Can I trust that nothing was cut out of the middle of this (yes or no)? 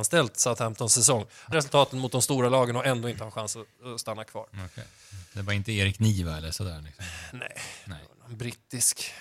no